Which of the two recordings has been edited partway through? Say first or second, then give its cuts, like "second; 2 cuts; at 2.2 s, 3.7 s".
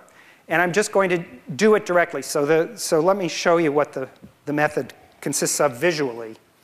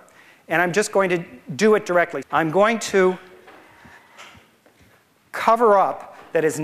second; 1 cut; at 2.2 s